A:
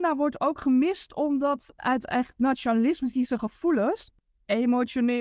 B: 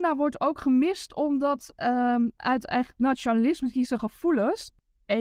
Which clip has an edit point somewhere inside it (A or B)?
A